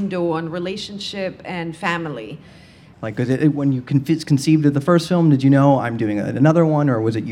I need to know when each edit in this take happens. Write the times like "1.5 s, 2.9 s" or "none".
2.9 s